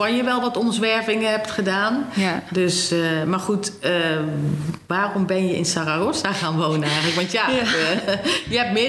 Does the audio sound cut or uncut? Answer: uncut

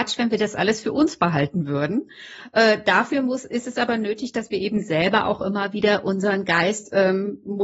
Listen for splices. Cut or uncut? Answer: uncut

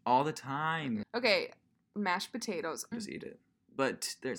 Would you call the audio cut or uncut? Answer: cut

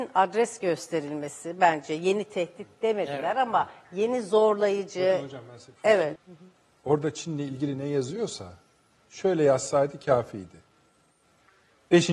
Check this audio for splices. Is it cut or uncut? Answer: cut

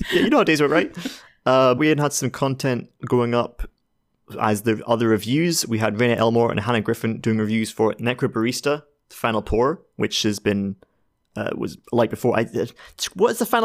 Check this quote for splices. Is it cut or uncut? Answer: cut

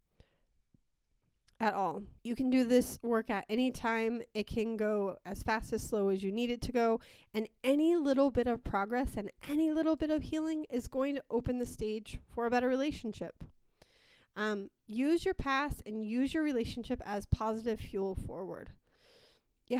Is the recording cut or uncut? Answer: cut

